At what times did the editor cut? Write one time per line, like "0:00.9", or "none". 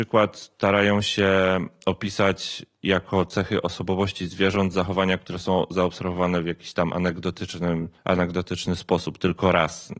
0:08.0